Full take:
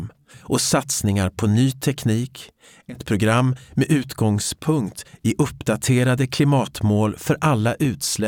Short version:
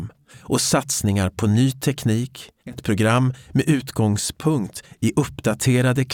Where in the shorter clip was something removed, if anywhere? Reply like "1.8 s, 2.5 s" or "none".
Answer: 2.6 s